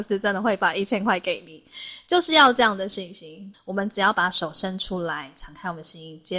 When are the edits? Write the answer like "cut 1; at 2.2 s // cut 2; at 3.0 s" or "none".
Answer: cut 1; at 3.5 s